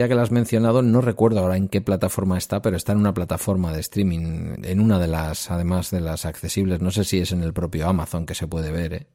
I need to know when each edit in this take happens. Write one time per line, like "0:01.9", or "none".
0:04.5